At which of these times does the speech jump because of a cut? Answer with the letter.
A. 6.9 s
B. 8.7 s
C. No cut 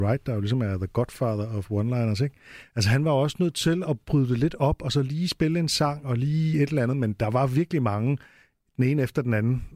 C